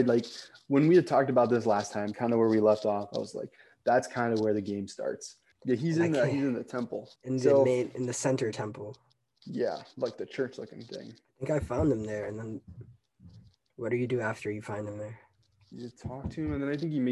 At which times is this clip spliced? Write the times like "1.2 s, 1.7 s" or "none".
5.5 s, 7.2 s

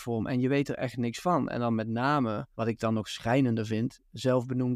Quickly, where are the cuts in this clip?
2.5 s

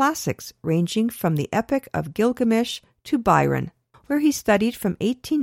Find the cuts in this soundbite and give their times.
3.9 s

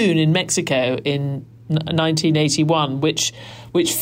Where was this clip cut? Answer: none

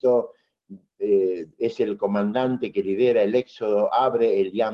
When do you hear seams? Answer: none

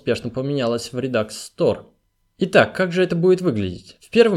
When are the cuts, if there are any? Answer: 2.2 s

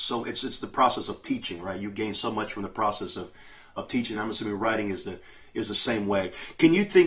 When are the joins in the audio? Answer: none

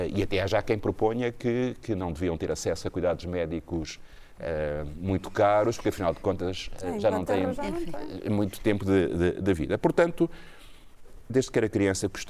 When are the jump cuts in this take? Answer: 11.3 s

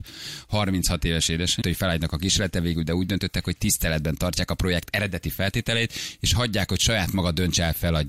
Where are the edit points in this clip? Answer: 1.6 s

